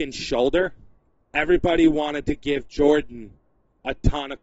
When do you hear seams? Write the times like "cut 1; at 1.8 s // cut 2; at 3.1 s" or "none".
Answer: cut 1; at 1.3 s